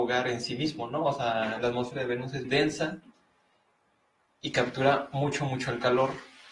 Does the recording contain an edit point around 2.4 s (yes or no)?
yes